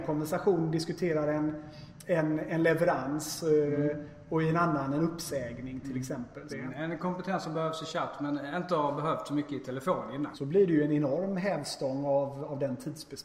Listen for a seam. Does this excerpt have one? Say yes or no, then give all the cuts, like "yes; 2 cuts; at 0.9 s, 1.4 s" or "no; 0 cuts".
yes; 2 cuts; at 6.5 s, 10.3 s